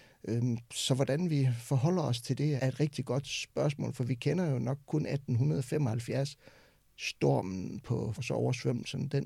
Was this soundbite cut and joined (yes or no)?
yes